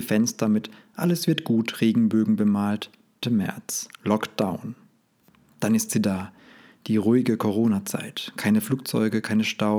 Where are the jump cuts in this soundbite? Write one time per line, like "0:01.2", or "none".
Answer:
0:03.2